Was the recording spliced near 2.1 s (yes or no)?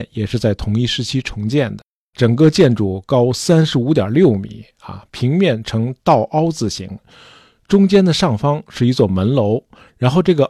yes